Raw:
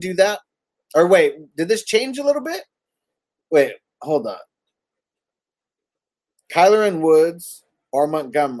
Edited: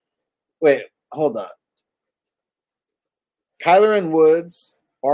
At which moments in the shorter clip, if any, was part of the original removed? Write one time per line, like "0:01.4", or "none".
none